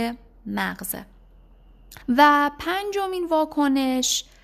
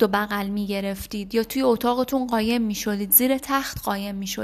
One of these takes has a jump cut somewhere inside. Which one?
first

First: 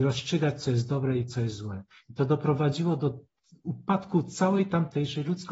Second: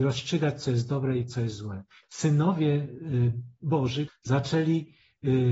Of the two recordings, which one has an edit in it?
second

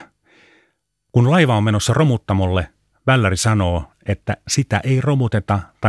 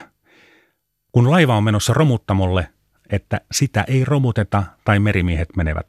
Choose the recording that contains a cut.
second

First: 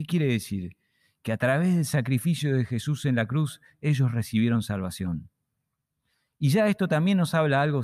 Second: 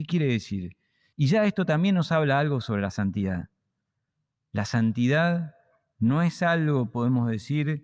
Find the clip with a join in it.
second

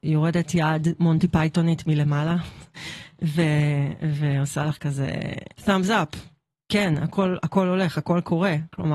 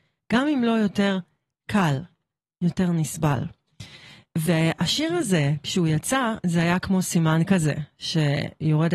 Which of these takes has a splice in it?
first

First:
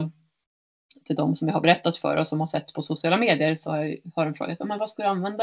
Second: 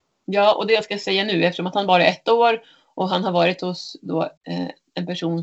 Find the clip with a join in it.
second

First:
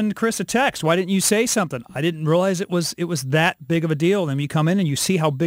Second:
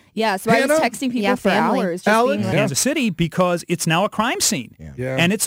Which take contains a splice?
second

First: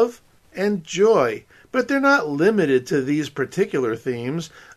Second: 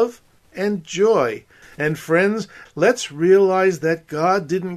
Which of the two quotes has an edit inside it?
second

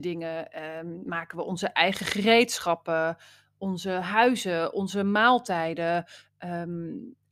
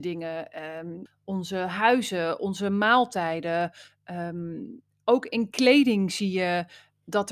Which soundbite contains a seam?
second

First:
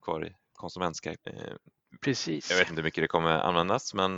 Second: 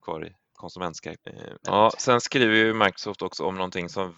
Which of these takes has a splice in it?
second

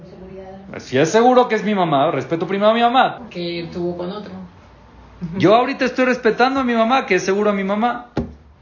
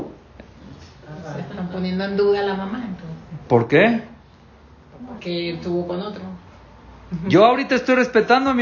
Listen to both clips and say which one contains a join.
first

